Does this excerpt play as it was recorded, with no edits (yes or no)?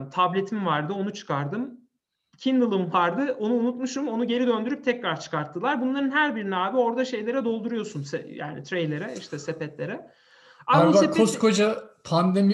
yes